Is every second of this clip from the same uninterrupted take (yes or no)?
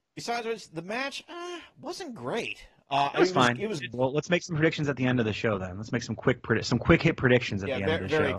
no